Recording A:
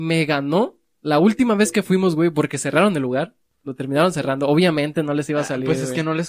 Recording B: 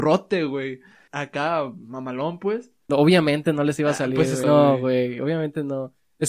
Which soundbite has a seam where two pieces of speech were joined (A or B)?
B